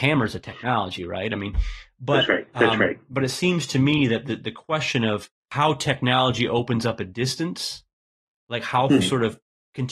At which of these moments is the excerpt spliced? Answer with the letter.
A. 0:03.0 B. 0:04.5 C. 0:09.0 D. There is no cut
C